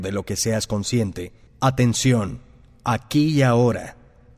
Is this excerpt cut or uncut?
cut